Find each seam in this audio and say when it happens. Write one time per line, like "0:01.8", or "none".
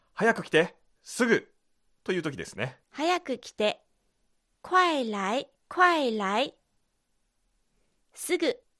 0:02.8
0:05.6